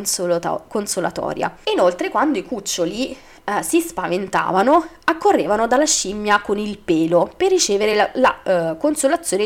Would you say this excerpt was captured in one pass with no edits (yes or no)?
yes